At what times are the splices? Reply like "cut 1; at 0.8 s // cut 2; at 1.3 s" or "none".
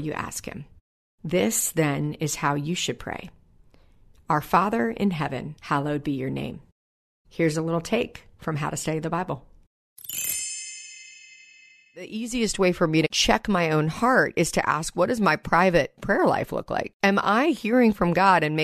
cut 1; at 5.6 s